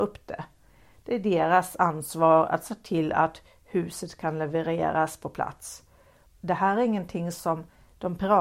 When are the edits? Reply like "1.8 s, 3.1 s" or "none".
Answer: 6.3 s